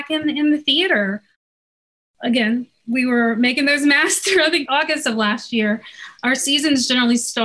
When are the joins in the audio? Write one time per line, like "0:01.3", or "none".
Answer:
0:04.7